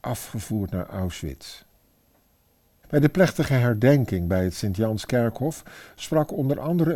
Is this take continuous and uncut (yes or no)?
no